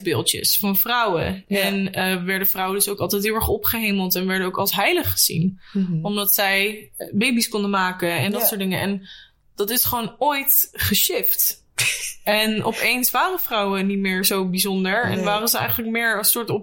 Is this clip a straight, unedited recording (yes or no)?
yes